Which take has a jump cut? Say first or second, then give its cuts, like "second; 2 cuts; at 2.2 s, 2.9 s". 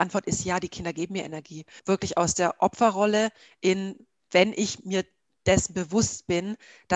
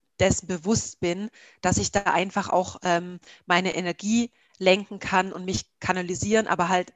first; 1 cut; at 1.8 s